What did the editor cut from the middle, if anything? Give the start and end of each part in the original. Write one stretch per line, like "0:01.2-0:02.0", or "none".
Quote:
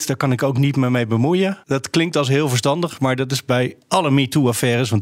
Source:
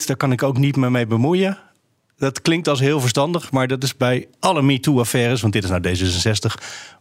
0:01.6-0:02.1